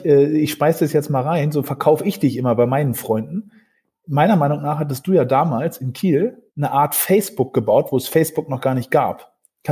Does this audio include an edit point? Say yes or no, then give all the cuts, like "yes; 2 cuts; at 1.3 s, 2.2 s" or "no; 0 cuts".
yes; 1 cut; at 6.5 s